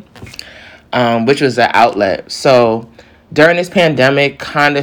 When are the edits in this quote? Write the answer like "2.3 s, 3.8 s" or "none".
none